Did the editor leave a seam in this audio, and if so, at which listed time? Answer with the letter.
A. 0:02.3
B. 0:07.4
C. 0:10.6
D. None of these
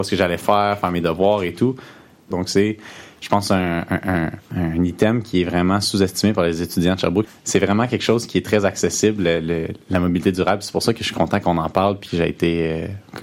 A